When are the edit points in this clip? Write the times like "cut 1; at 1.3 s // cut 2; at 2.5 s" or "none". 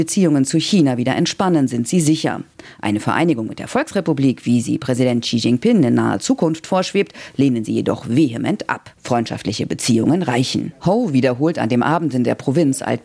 none